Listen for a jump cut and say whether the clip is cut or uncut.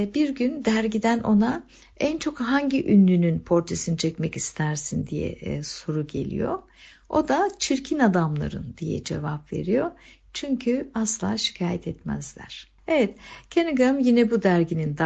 cut